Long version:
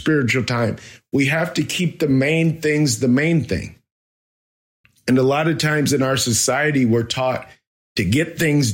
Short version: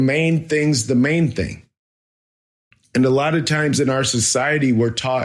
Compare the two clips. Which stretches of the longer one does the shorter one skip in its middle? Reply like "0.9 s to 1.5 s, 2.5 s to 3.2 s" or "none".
none